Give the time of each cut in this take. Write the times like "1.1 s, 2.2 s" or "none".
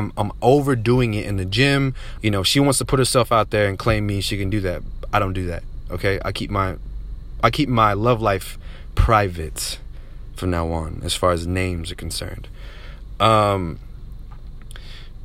2.2 s